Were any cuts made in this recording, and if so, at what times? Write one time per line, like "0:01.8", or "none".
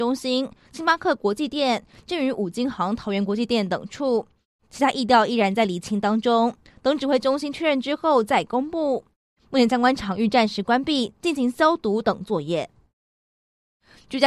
none